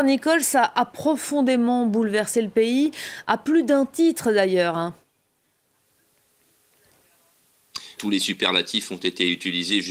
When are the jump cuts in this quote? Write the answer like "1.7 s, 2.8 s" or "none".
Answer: 8.0 s